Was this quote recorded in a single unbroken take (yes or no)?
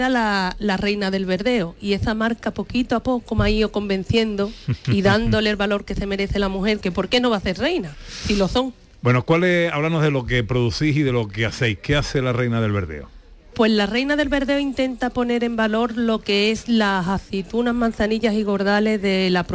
no